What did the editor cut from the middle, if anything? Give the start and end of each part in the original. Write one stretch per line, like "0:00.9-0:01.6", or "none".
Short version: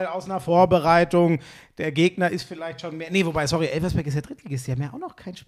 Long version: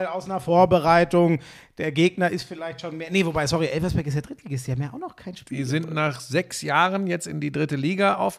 none

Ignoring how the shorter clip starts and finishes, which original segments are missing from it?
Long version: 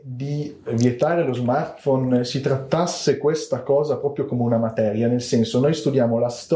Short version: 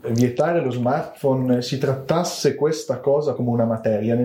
0:04.0-0:04.3

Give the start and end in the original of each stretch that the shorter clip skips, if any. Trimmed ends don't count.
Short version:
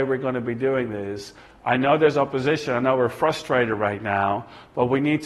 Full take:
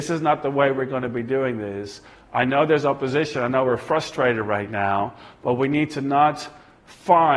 none

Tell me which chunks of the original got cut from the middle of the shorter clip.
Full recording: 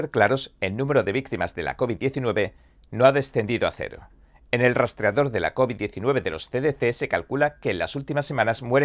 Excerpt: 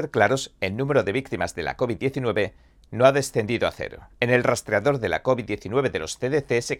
0:04.1-0:04.4

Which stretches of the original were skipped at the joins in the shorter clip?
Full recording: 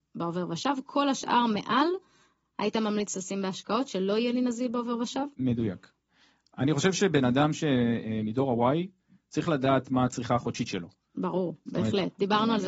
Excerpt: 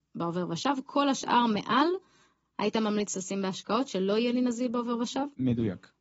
none

